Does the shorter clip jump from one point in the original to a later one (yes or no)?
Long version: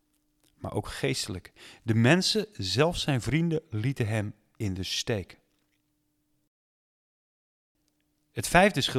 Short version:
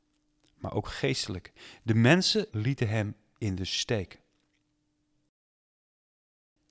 yes